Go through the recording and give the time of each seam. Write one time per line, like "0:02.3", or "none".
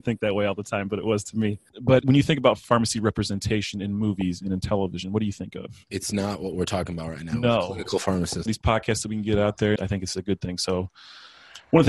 0:08.5
0:09.8

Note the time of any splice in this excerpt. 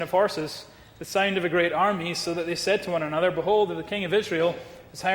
none

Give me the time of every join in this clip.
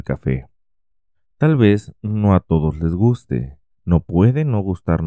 0:03.7

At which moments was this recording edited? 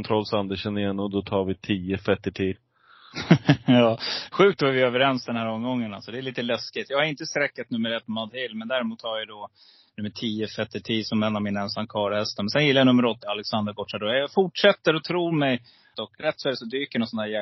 0:13.2
0:15.9

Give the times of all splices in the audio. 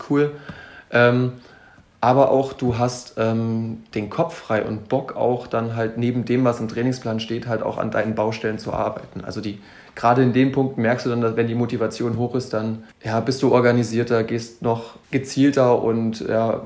0:12.9
0:15.0

